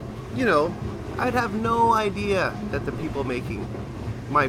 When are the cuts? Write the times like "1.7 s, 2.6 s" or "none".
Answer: 1.1 s